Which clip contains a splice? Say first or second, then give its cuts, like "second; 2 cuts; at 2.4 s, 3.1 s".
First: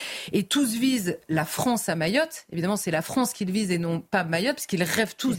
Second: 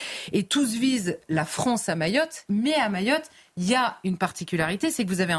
second; 1 cut; at 2.5 s